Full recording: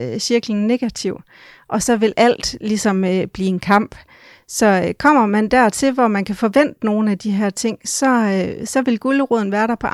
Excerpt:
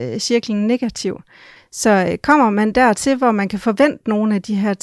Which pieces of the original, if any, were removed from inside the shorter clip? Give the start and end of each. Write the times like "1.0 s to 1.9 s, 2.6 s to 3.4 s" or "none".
1.6 s to 4.3 s